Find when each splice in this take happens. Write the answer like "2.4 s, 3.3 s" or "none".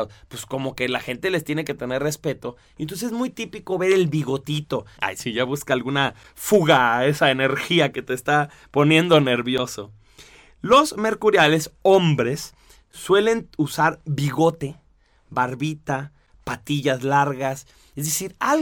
5.0 s